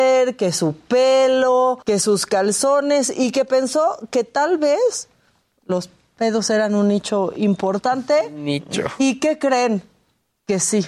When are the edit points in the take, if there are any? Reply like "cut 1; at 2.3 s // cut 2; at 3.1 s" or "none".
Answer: cut 1; at 1.8 s